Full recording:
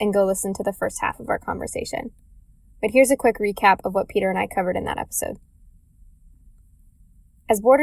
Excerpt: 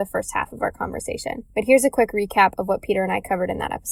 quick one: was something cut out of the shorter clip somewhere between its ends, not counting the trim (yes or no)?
yes